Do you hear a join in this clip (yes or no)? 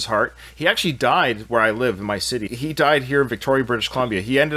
yes